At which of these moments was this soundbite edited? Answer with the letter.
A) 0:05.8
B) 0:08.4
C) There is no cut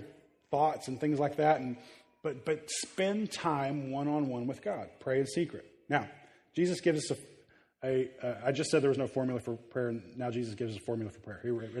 C